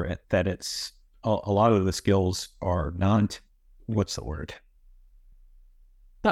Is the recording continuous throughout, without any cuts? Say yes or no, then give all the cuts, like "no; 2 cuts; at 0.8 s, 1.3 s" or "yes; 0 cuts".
yes; 0 cuts